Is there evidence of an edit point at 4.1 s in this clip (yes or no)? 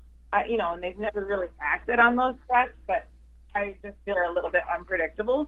yes